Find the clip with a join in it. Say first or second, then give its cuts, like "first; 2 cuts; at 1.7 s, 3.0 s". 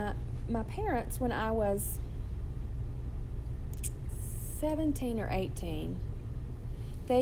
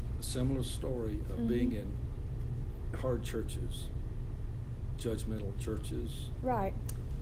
second; 2 cuts; at 2.9 s, 5.0 s